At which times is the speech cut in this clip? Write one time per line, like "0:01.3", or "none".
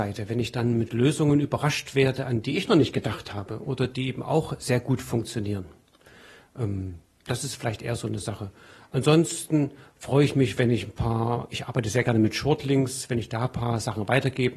none